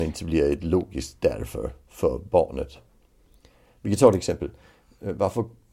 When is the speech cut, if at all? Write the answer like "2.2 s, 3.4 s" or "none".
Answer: none